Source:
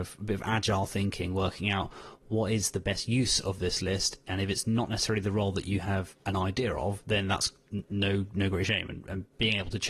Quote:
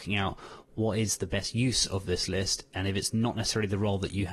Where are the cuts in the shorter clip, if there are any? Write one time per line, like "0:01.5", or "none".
none